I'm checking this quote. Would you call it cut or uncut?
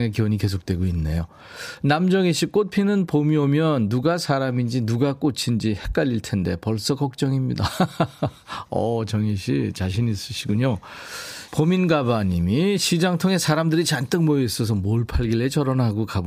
cut